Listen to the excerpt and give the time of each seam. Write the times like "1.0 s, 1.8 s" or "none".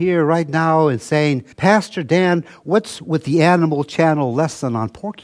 1.5 s

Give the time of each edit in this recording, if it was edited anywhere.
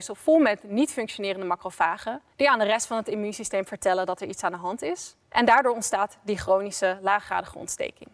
2.3 s, 5.2 s

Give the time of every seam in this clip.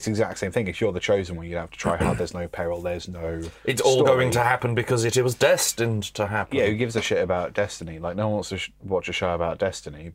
none

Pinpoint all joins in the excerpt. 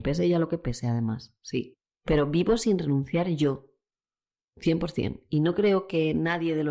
4.3 s

